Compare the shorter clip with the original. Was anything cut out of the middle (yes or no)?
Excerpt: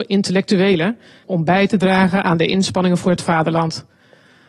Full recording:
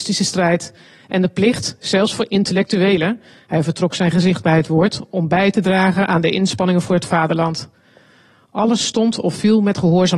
yes